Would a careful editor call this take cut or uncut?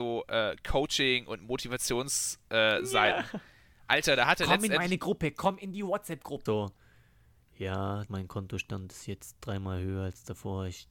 cut